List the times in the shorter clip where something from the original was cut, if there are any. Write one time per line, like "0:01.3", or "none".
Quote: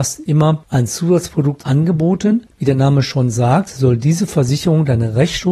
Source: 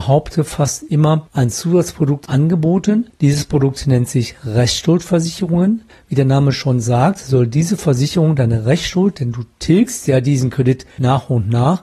0:02.5